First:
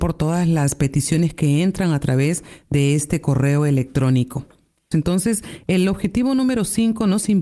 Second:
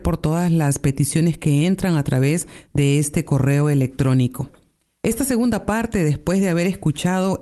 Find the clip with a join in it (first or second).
first